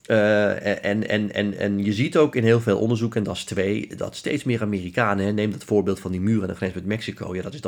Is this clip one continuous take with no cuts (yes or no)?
yes